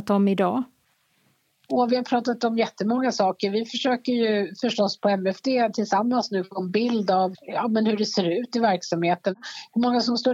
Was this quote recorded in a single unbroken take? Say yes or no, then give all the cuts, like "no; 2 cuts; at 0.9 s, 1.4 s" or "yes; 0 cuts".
yes; 0 cuts